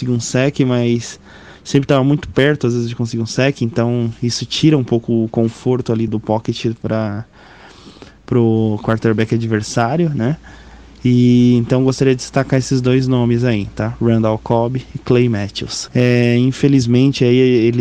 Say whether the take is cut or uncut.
cut